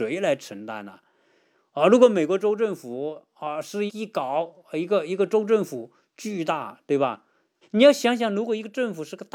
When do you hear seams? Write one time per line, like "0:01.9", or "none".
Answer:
0:03.9
0:07.6